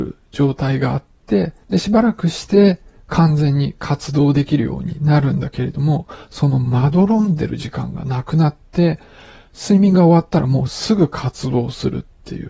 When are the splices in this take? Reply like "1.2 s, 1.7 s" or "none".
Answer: 1.6 s